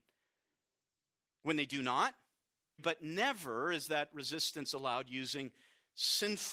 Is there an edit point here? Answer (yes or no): yes